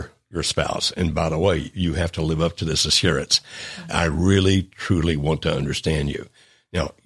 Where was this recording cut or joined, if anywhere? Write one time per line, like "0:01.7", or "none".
0:03.9